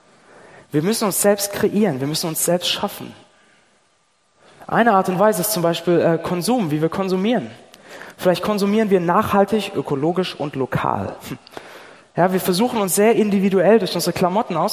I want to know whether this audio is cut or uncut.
cut